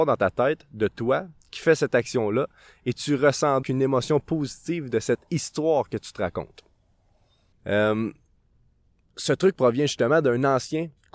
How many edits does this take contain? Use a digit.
2